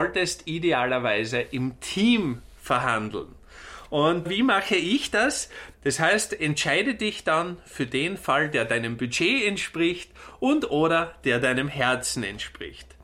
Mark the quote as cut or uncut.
cut